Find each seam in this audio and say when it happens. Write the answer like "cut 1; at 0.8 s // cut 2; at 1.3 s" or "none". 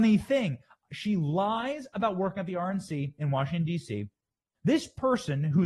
cut 1; at 4.5 s